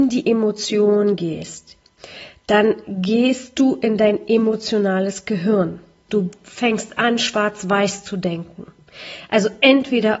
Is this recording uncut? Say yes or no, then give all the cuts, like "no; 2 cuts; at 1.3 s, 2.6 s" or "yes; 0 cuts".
no; 1 cut; at 6.1 s